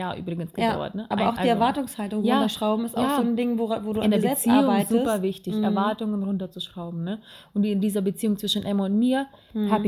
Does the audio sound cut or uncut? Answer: uncut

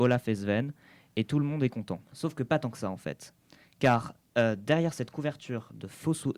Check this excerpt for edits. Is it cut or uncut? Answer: cut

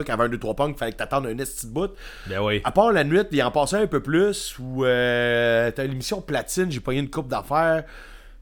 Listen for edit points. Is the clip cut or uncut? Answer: uncut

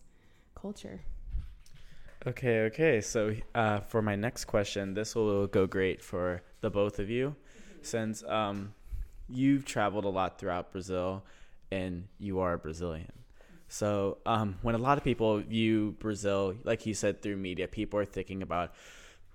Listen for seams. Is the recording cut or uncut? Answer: uncut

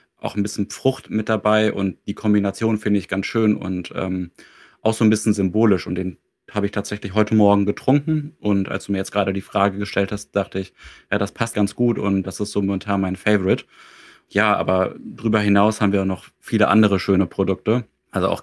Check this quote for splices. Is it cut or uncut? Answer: cut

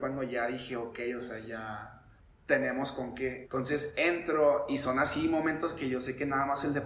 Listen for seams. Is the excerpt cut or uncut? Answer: cut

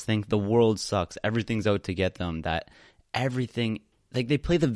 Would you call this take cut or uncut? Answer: uncut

